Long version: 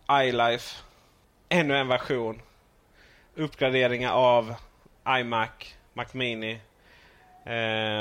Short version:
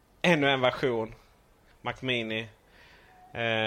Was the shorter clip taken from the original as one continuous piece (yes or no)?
no